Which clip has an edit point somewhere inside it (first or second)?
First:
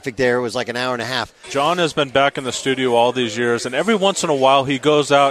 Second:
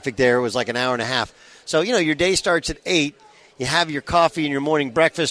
first